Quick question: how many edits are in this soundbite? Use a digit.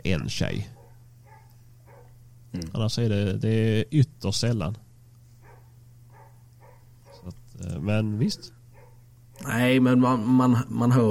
0